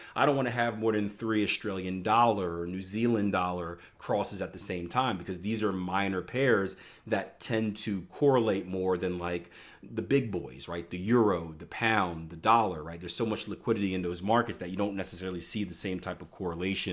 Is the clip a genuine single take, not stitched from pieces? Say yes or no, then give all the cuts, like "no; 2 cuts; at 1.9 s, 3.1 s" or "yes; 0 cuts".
yes; 0 cuts